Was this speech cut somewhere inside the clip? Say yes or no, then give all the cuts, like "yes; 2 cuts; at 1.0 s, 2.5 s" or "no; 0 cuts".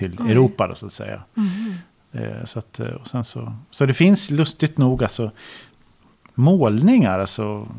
no; 0 cuts